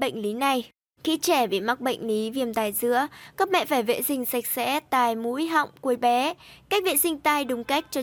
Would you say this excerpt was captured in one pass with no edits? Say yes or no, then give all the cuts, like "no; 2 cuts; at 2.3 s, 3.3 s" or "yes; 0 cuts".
no; 1 cut; at 1.0 s